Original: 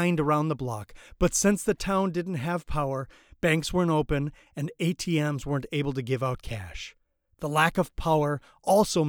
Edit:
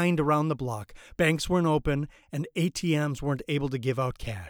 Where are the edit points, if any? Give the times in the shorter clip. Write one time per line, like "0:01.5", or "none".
0:01.2